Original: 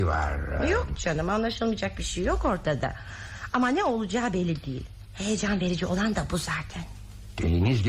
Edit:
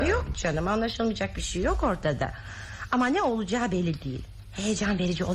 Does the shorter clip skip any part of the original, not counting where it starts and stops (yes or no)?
no